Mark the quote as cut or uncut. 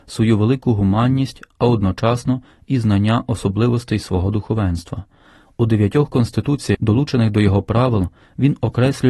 uncut